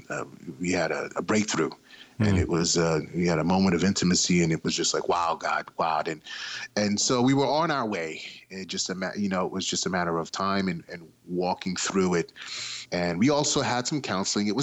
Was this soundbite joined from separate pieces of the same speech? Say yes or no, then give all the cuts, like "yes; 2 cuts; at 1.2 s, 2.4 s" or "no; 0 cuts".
no; 0 cuts